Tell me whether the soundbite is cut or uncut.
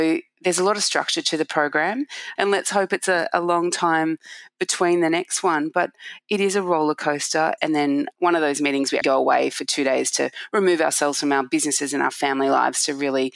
cut